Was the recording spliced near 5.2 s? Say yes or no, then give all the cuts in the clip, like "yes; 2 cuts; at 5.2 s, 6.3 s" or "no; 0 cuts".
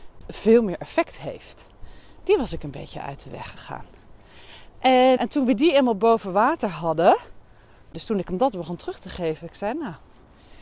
yes; 1 cut; at 5.2 s